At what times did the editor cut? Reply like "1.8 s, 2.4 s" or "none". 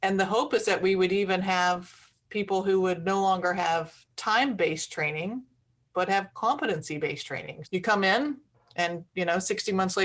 7.6 s